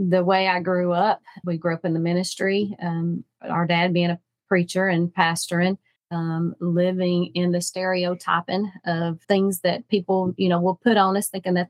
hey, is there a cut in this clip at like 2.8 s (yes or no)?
no